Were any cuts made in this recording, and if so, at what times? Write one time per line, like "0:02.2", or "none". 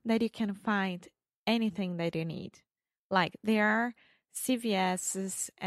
none